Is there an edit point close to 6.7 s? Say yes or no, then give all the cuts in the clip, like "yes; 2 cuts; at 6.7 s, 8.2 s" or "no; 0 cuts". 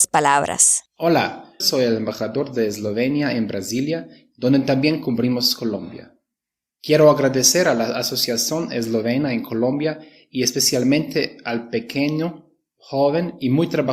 no; 1 cut; at 1.6 s